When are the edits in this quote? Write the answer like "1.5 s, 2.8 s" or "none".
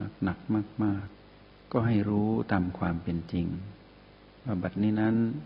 1.1 s